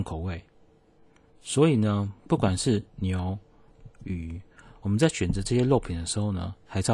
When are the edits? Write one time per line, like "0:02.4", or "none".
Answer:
0:01.3
0:03.9